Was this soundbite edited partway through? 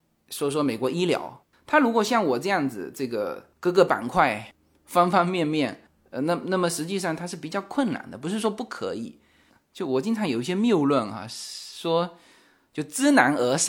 no; 0 cuts

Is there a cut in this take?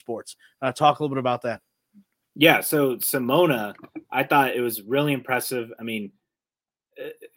no; 0 cuts

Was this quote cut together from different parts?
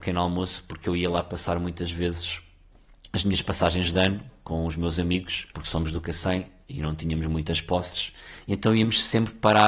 yes; 1 cut; at 5.5 s

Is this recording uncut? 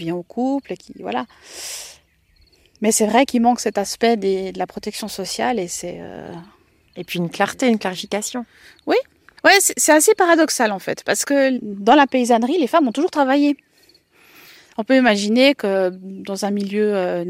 yes; 0 cuts

